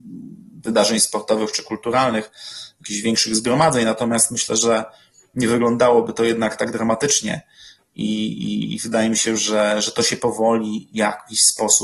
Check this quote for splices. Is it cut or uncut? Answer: uncut